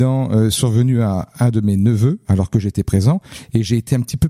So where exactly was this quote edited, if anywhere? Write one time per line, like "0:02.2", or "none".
none